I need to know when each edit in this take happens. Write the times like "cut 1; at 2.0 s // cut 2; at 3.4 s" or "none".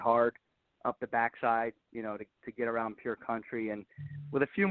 none